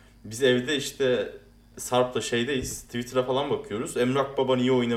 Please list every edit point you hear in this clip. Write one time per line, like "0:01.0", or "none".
0:01.7